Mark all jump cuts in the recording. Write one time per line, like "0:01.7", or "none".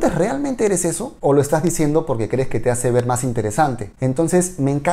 0:01.2
0:03.9